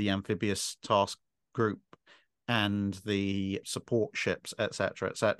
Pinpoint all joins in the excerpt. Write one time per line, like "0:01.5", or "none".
0:03.6